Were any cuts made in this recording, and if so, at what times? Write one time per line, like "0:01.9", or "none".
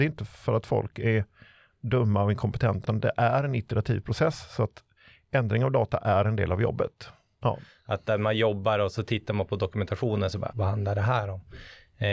0:02.8
0:07.4
0:10.5